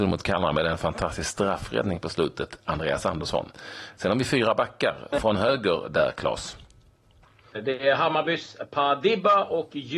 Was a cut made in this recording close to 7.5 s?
yes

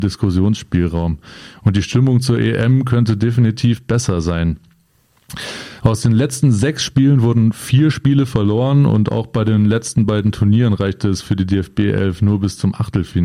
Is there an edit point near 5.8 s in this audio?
yes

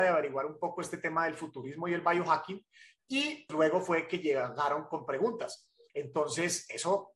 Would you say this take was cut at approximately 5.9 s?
yes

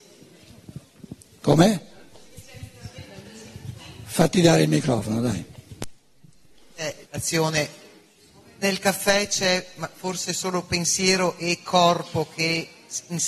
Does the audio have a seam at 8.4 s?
no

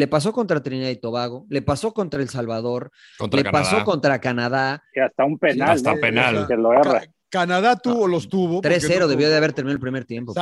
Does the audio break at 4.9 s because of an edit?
yes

